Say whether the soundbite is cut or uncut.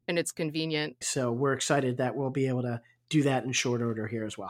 cut